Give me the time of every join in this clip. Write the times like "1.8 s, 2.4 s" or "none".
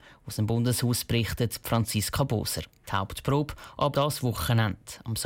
2.8 s, 3.9 s